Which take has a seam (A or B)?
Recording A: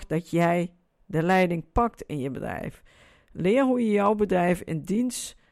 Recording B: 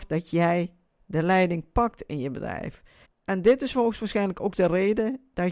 B